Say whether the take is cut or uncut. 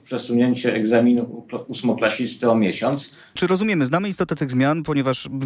cut